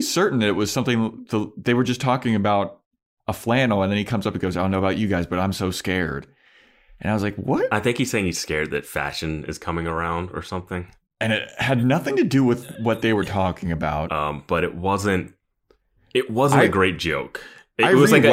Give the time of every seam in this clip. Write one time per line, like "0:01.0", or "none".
0:11.1
0:14.1